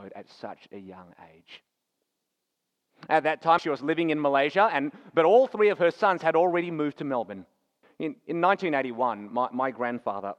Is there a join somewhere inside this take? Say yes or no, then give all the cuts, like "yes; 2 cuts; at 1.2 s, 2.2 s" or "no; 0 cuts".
yes; 2 cuts; at 3.6 s, 7.8 s